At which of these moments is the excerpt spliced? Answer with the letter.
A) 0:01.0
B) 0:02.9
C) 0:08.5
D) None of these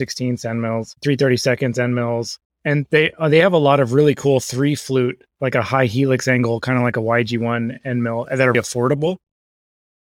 C